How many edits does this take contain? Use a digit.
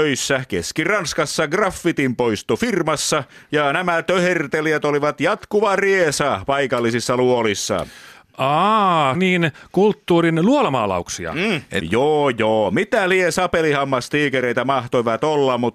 2